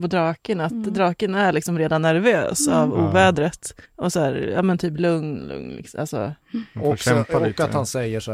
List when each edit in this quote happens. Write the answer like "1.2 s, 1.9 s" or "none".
3.8 s